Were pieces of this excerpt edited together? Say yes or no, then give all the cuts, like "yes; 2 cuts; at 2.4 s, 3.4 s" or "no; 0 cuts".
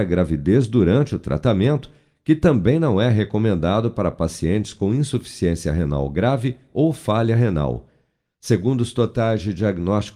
no; 0 cuts